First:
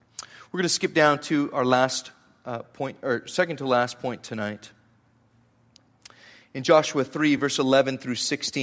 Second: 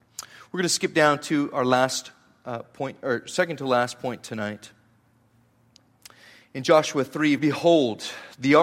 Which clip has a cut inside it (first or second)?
second